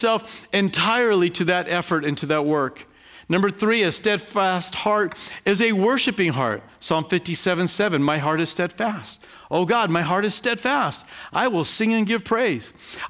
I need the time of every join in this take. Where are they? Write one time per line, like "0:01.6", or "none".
none